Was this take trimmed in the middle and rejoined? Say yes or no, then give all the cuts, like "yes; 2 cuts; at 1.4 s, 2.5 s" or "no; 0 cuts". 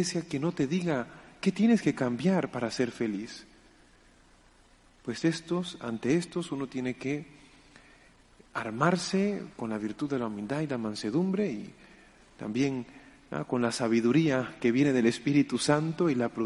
no; 0 cuts